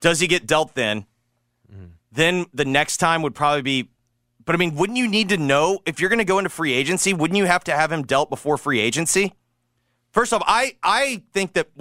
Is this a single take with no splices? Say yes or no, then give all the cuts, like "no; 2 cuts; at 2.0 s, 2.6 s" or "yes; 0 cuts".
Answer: yes; 0 cuts